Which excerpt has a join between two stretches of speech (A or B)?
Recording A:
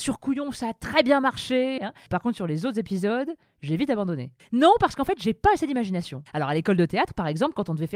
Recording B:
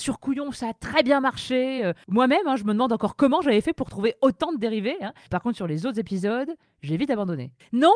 A